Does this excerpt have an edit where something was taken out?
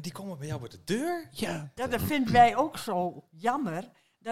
yes; 1 cut; at 1.8 s

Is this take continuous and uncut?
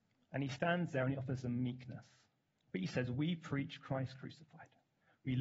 no; 1 cut; at 2.6 s

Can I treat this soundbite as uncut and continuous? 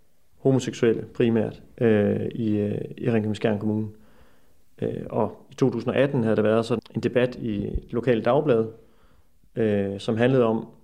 no; 1 cut; at 6.8 s

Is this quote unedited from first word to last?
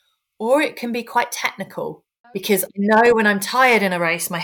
no; 1 cut; at 2.2 s

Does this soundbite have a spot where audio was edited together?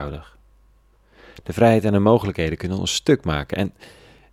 no; 0 cuts

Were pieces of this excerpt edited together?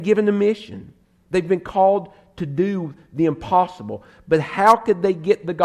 no; 0 cuts

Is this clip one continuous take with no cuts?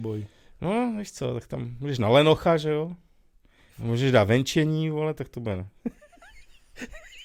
no; 1 cut; at 3.7 s

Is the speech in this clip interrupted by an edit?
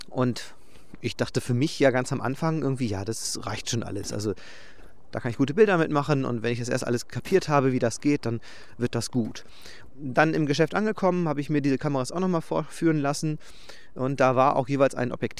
yes; 1 cut; at 9.9 s

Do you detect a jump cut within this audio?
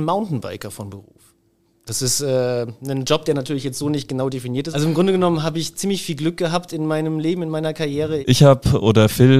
yes; 2 cuts; at 4.7 s, 8.2 s

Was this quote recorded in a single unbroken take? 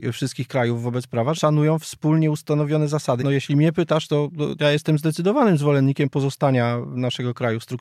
no; 3 cuts; at 1.3 s, 3.2 s, 4.6 s

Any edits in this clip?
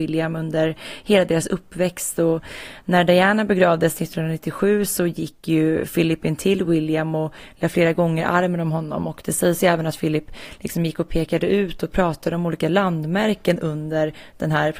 no; 0 cuts

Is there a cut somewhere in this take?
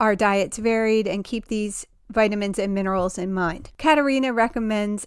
yes; 1 cut; at 3.7 s

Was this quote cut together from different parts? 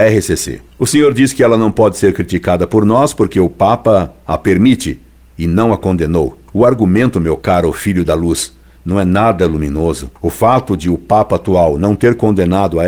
no; 0 cuts

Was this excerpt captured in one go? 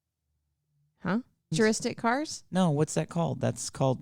no; 1 cut; at 1.5 s

